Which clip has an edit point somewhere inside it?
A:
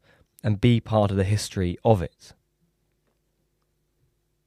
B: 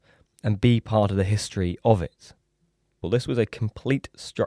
B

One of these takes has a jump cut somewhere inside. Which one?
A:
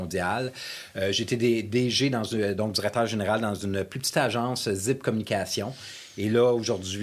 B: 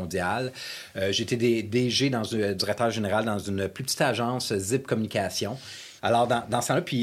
B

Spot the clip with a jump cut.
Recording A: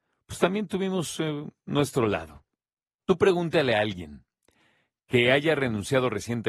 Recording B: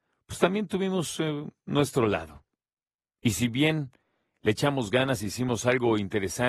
A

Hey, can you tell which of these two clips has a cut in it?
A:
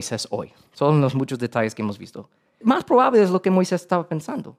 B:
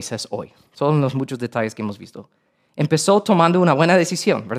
A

